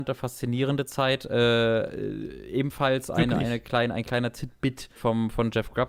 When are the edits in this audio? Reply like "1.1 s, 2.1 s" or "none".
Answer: 5.0 s